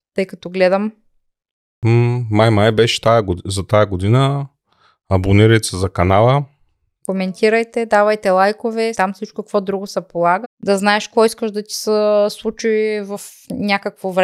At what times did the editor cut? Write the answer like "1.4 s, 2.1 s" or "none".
8.9 s, 10.4 s